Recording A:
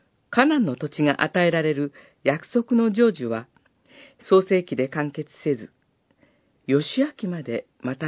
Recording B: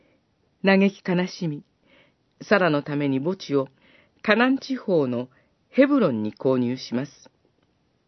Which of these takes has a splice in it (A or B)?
A